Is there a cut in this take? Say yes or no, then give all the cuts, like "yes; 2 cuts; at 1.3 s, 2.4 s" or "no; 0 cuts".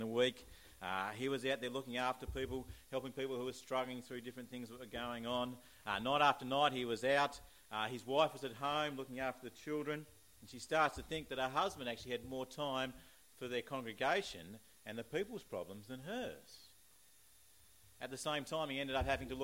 no; 0 cuts